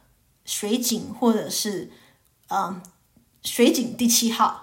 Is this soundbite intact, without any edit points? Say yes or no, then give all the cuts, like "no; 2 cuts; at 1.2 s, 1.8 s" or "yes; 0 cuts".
yes; 0 cuts